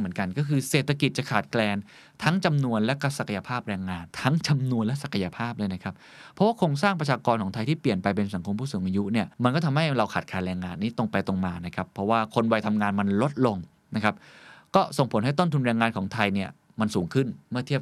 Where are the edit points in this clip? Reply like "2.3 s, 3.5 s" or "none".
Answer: 4.1 s, 9.3 s